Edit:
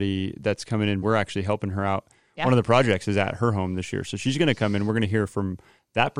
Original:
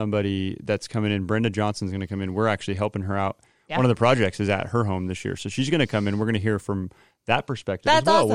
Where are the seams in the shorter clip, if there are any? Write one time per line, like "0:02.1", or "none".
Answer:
0:01.0